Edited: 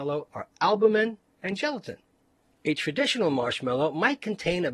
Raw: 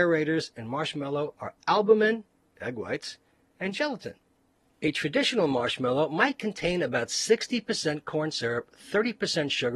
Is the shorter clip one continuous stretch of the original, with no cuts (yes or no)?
no